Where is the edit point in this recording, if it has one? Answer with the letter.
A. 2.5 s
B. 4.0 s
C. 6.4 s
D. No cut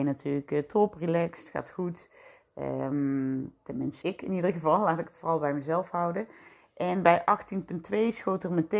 B